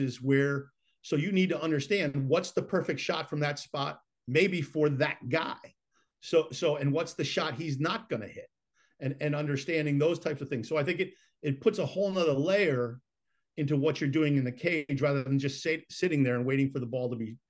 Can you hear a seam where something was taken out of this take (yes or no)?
no